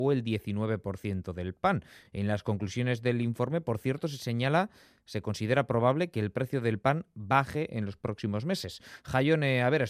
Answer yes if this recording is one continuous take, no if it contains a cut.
yes